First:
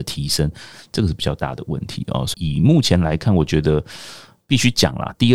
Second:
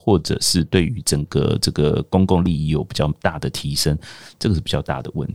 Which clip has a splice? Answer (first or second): first